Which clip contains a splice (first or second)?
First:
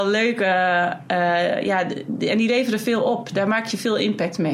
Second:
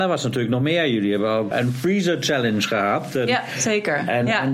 second